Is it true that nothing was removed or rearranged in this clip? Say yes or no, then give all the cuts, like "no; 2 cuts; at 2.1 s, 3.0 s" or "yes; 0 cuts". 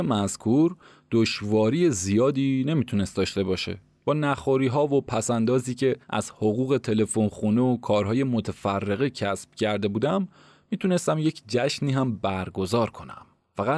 no; 1 cut; at 6.0 s